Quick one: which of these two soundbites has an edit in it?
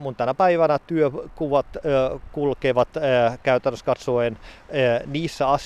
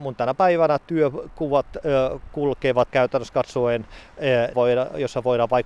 second; 2 cuts; at 2.9 s, 4.5 s

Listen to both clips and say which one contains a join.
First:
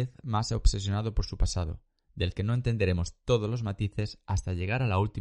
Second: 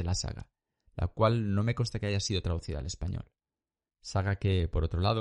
second; 1 cut; at 3.9 s

